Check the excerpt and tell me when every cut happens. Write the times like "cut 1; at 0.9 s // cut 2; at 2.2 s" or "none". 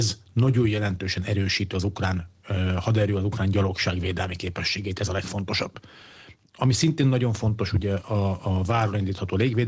none